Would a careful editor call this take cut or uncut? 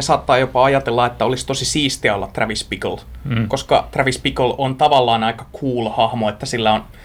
uncut